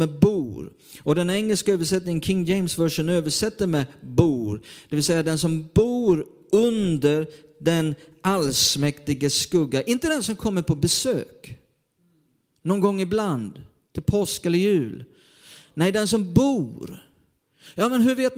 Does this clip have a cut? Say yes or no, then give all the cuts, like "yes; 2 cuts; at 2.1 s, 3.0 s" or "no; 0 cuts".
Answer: no; 0 cuts